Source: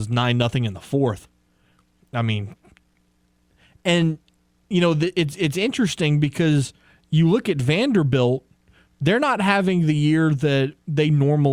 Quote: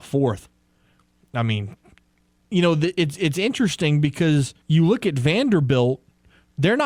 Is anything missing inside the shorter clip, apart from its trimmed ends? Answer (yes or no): yes